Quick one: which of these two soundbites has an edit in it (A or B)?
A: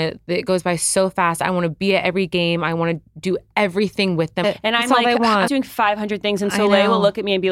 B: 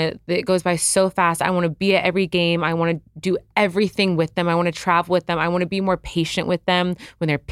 A